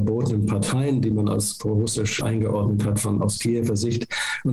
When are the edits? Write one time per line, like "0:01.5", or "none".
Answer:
0:02.2